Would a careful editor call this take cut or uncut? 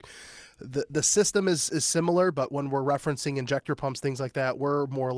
uncut